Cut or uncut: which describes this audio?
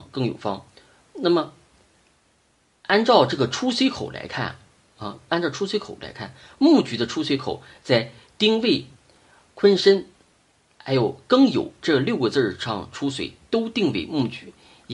uncut